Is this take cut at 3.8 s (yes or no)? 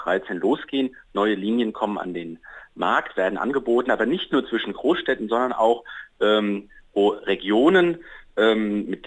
no